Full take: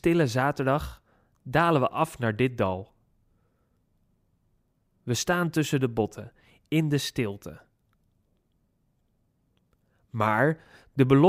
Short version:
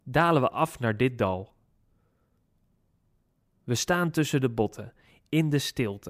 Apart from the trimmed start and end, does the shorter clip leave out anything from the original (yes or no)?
no